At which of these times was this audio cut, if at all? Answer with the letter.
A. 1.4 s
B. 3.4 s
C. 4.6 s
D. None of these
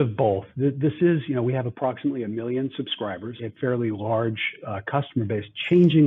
B